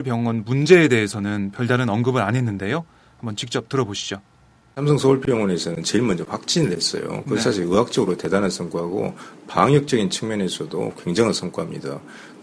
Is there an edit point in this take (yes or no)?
no